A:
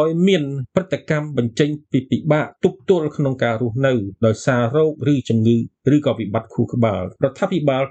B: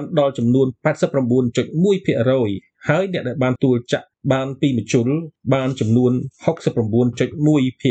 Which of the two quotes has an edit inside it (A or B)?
B